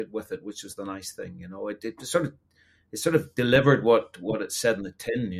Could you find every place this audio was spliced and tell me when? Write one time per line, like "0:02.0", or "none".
none